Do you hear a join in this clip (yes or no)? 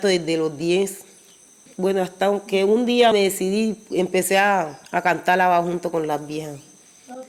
yes